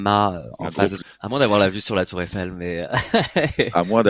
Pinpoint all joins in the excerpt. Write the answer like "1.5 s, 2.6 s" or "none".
1.0 s